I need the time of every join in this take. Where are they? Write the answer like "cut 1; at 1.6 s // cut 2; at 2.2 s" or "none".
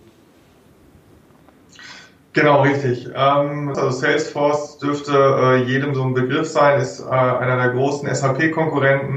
cut 1; at 3.7 s // cut 2; at 5.9 s